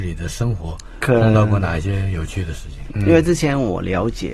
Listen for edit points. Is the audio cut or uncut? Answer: cut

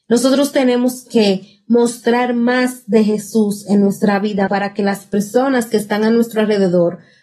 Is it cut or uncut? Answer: cut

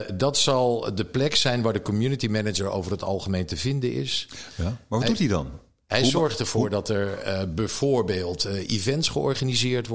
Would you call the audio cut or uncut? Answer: uncut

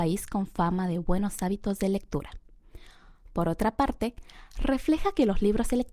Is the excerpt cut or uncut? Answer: uncut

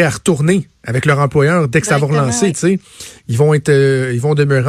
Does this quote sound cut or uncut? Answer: uncut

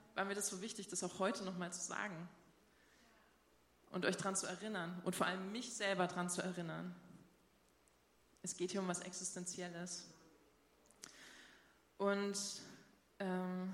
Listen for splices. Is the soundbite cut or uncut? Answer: uncut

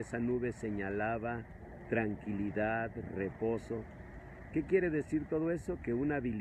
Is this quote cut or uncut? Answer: cut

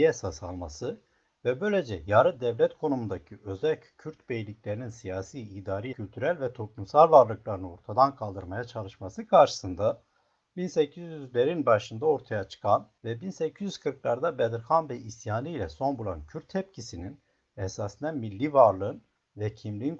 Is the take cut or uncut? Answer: cut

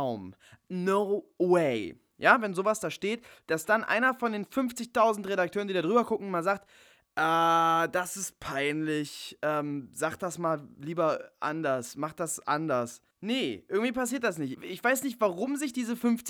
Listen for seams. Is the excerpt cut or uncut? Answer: cut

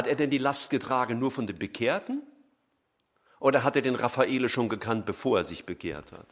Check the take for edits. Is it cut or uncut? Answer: uncut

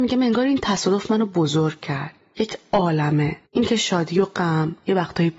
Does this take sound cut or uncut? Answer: cut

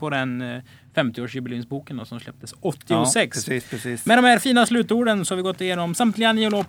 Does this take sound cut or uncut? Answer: uncut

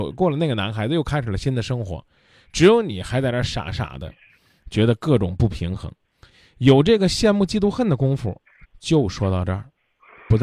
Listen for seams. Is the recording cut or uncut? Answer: cut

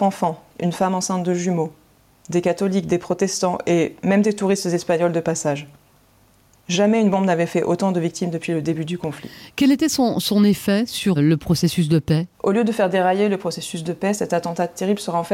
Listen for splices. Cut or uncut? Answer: cut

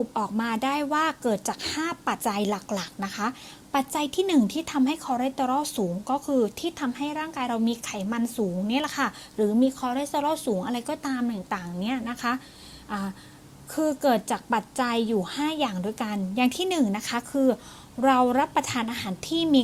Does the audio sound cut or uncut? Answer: cut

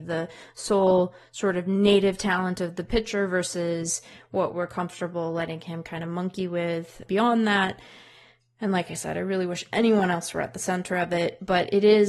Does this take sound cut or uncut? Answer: uncut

